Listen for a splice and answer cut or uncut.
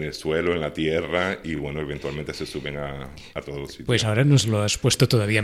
uncut